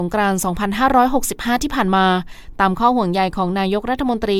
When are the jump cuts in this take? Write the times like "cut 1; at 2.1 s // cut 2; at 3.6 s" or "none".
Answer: none